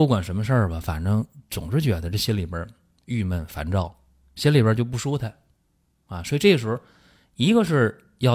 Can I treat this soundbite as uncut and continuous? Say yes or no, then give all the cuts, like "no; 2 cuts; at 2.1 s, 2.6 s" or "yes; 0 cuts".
yes; 0 cuts